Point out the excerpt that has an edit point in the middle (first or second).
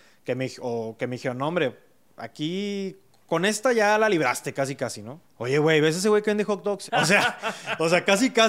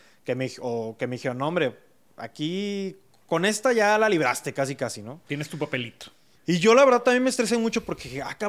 first